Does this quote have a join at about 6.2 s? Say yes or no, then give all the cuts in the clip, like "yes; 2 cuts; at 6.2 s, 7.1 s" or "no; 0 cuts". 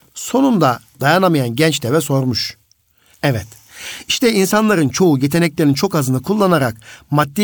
no; 1 cut; at 3.1 s